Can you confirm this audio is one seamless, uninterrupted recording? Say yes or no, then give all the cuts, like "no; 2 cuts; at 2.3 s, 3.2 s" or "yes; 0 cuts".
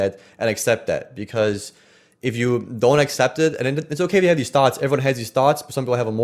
yes; 0 cuts